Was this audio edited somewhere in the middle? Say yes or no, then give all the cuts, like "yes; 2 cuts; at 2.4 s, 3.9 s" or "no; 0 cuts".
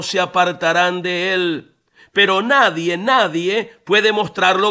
no; 0 cuts